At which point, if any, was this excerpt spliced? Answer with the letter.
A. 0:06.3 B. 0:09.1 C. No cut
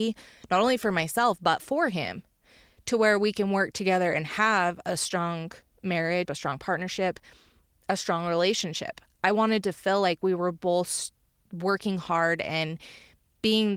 A